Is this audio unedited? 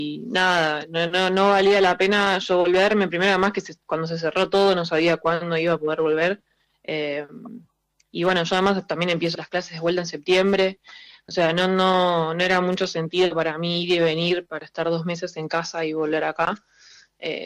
no; 1 cut; at 9.3 s

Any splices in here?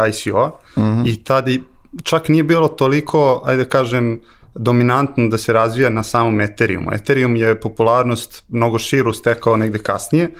no; 0 cuts

